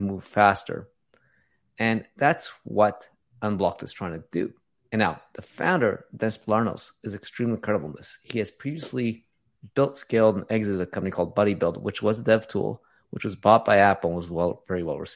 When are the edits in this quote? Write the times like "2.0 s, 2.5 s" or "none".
none